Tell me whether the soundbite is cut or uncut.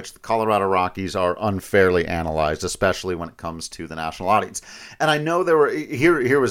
uncut